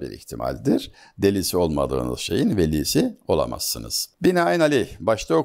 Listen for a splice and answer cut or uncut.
uncut